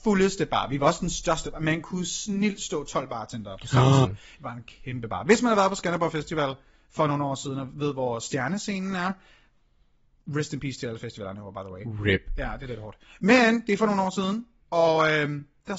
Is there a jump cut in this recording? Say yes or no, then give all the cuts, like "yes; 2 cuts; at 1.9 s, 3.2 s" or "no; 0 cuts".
yes; 1 cut; at 4.0 s